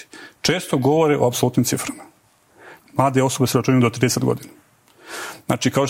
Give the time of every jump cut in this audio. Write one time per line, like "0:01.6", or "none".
0:02.9